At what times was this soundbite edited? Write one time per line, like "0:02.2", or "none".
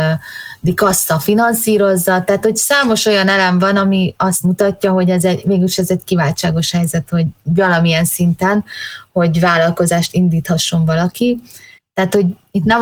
0:11.8